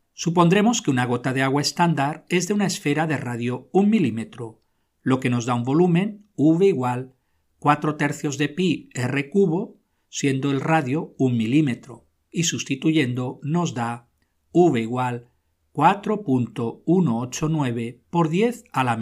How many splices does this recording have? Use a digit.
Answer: 0